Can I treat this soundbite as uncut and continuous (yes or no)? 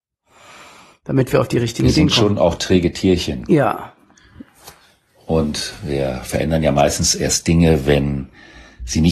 yes